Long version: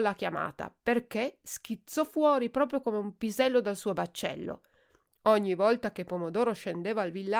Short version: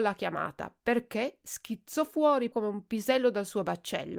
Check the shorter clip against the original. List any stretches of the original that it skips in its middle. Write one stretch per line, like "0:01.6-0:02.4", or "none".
0:02.5-0:02.8